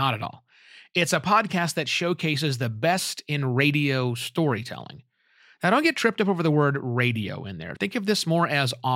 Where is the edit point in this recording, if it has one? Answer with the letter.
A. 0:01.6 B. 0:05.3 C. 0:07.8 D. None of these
D